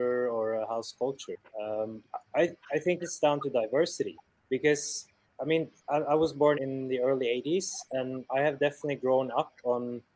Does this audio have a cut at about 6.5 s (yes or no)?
yes